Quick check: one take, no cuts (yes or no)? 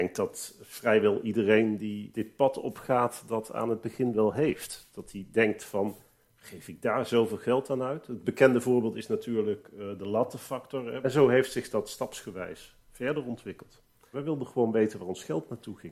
no